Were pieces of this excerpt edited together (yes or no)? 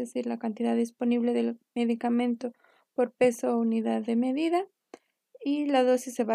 no